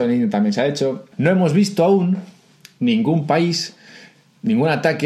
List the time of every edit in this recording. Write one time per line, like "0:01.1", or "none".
0:01.1